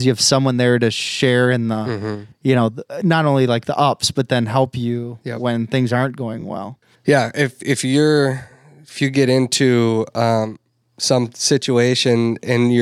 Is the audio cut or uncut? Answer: uncut